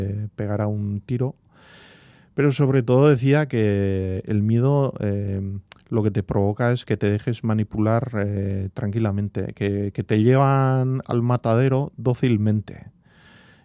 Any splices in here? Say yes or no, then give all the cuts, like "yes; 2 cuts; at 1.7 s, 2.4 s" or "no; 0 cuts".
no; 0 cuts